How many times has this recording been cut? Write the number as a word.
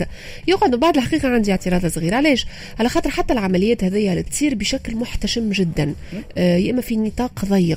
one